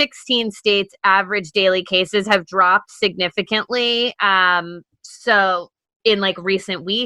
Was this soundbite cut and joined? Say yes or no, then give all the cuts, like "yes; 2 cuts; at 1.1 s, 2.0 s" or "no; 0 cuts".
no; 0 cuts